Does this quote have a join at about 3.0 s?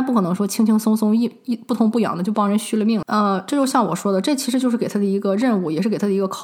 yes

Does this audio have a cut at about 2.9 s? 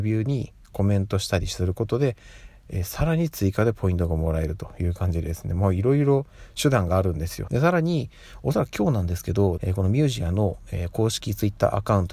no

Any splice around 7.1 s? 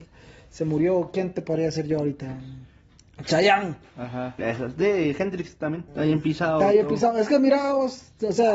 no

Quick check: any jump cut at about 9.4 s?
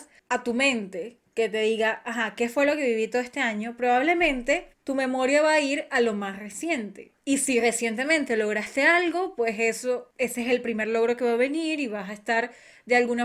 no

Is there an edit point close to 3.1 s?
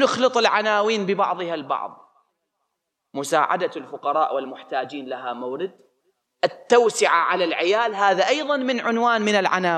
no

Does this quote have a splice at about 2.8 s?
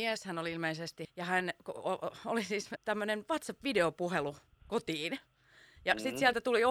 yes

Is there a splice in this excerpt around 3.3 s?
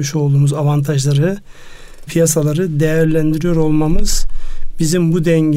no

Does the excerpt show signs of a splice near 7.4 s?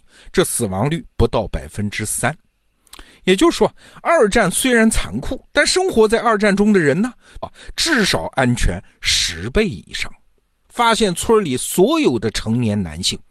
yes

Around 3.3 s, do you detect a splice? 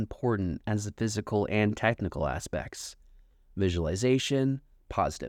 no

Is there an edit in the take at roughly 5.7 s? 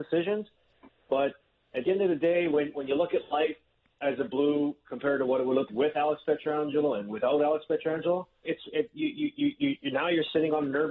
yes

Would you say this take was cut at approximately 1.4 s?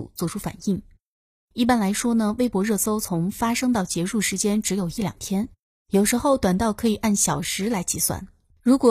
no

